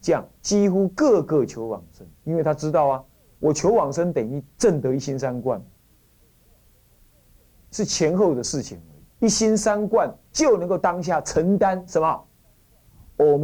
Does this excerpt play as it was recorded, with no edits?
no; 2 cuts; at 2.1 s, 9.2 s

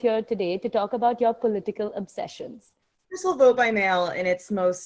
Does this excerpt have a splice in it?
yes; 1 cut; at 2.9 s

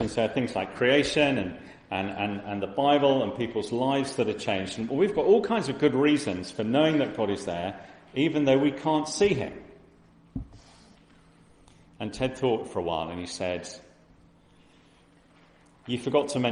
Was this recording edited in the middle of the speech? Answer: no; 0 cuts

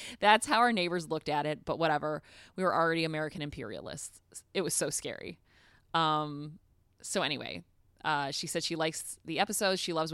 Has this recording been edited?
no; 0 cuts

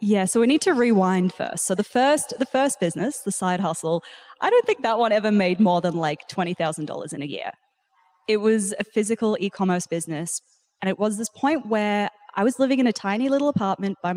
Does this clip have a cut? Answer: no; 0 cuts

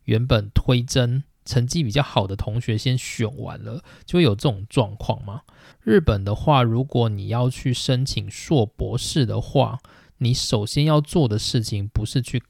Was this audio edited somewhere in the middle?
yes; 1 cut; at 5.7 s

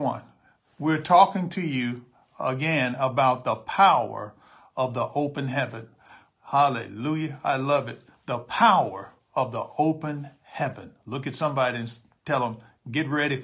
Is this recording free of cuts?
yes; 0 cuts

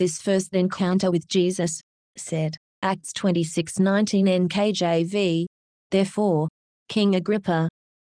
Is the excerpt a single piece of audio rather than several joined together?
yes; 0 cuts

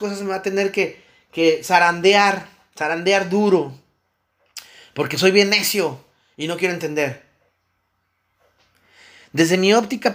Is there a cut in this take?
no; 0 cuts

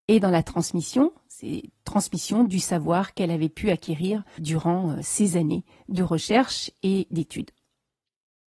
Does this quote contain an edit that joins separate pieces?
yes; 1 cut; at 4.4 s

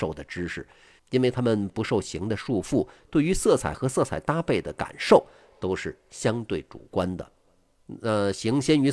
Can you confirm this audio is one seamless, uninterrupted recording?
no; 2 cuts; at 1.0 s, 3.0 s

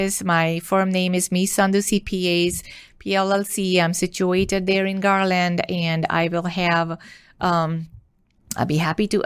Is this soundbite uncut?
yes; 0 cuts

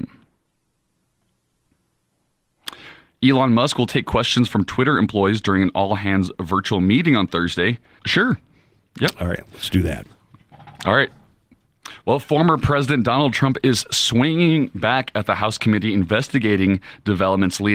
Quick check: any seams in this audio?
yes; 1 cut; at 8.0 s

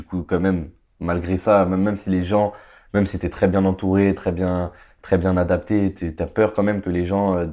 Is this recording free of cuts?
yes; 0 cuts

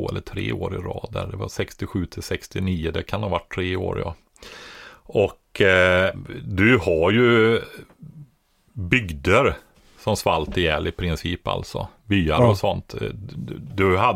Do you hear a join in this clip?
no; 0 cuts

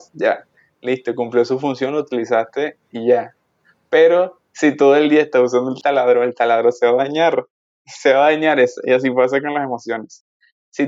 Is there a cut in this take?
no; 0 cuts

